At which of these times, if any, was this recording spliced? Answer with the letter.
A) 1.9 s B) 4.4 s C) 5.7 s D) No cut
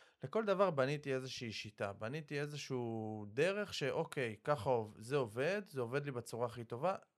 D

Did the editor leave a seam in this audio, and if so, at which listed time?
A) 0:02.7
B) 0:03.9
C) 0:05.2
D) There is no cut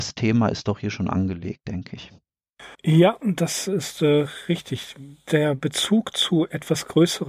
A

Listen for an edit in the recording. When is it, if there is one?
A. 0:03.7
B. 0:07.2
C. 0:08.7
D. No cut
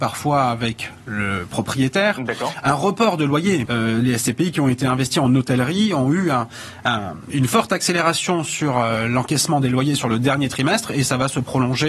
A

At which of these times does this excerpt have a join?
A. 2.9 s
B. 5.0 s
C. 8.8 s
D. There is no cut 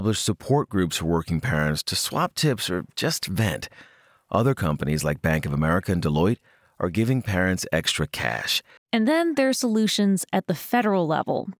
C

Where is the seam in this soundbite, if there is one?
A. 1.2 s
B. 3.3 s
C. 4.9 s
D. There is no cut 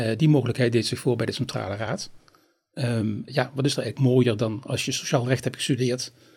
B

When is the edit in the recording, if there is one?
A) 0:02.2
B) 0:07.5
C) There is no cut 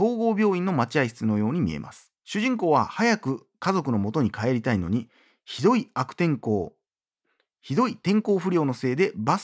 A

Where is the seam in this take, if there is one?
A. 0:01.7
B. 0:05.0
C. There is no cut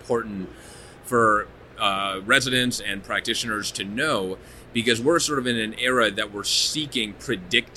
C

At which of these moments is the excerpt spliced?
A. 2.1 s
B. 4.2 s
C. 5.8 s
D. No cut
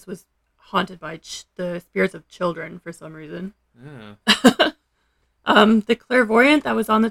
B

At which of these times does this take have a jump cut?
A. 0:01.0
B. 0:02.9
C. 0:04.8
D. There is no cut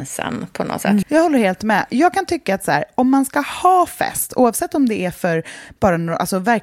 A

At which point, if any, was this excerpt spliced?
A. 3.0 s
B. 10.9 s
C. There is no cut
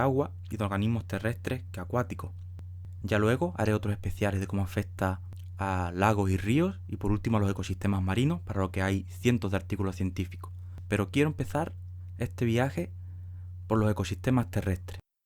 A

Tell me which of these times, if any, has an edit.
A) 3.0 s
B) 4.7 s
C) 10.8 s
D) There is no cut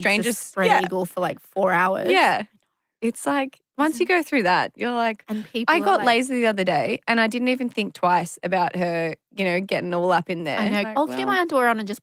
C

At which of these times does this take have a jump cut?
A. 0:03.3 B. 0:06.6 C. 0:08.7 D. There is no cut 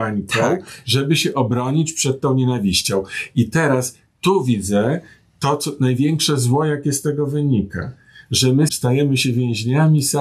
C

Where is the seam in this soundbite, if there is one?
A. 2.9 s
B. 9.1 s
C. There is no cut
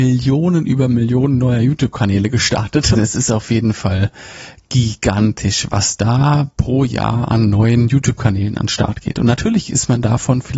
A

